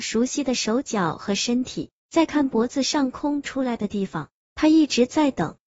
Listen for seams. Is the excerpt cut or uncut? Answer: uncut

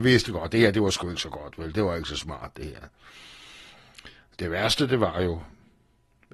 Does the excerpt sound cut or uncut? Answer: uncut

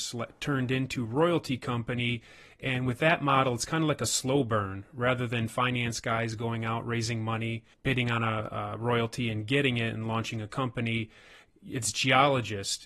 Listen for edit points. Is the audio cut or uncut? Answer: uncut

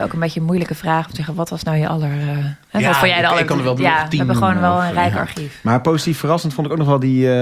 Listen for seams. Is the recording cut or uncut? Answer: uncut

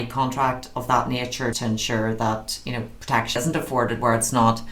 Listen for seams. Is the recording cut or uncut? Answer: cut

